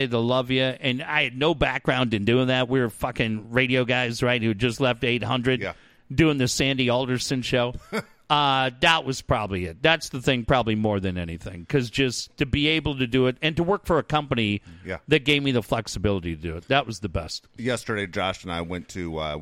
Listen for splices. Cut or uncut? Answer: uncut